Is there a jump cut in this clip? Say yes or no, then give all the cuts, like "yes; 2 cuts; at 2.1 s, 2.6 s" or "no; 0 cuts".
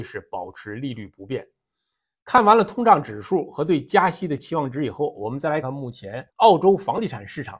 yes; 1 cut; at 5.6 s